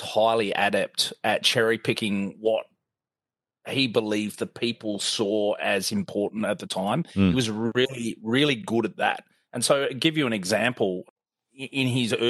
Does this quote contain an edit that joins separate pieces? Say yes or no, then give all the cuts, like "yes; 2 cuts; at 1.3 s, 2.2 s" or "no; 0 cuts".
no; 0 cuts